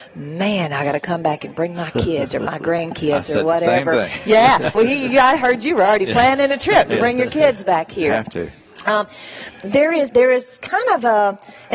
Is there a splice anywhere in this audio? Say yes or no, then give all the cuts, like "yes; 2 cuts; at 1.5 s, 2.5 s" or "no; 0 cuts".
yes; 2 cuts; at 4.7 s, 10.1 s